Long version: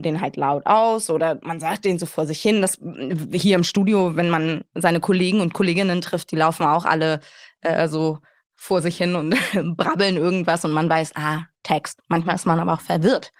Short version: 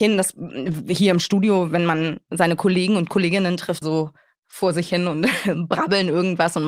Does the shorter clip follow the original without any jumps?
no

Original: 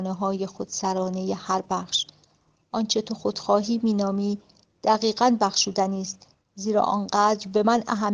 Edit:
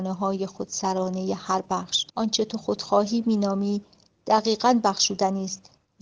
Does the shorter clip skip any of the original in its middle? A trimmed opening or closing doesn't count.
yes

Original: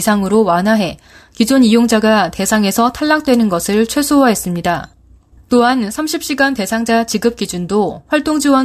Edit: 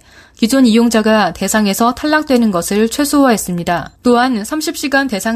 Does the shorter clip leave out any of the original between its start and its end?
yes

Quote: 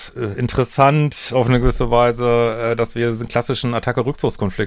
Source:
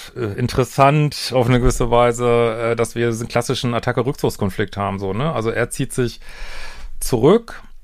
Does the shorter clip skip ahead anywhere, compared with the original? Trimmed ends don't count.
no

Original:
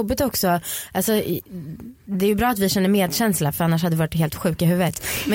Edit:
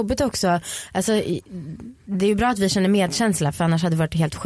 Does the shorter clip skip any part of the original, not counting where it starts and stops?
no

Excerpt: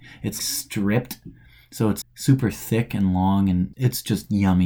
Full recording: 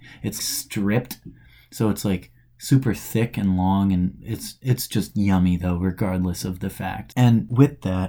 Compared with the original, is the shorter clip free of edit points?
no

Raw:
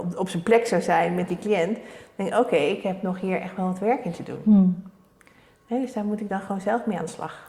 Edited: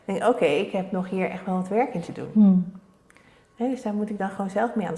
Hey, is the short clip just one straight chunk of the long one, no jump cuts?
yes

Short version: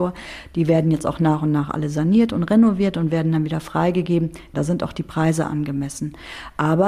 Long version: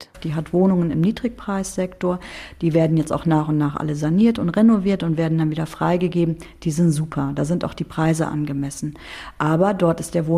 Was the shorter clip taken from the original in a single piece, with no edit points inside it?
no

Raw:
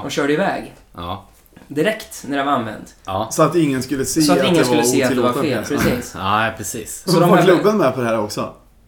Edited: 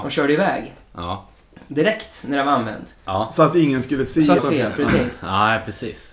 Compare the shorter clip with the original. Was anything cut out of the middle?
yes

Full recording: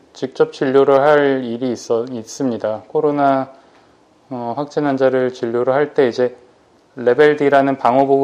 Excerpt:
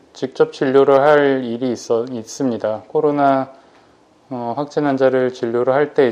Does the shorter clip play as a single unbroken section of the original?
yes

